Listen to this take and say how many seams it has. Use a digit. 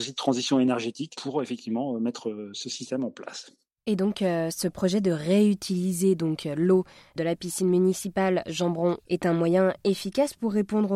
0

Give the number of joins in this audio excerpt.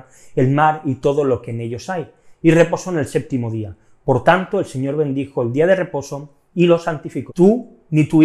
1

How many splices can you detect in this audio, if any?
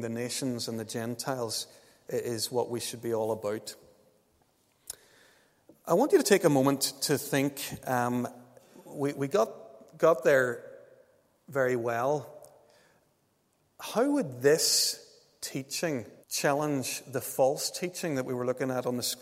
1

